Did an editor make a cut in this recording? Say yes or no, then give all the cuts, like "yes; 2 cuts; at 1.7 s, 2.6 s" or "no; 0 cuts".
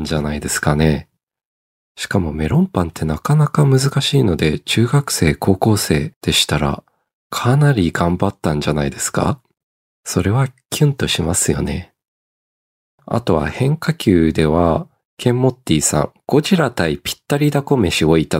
no; 0 cuts